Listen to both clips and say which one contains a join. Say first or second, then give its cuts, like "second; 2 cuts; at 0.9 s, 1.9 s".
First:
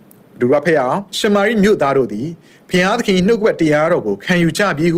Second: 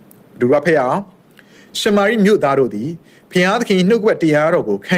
first; 1 cut; at 1.1 s